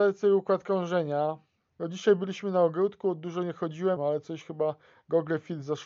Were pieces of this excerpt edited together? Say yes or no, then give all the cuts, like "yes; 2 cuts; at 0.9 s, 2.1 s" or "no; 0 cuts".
yes; 2 cuts; at 1.7 s, 4.0 s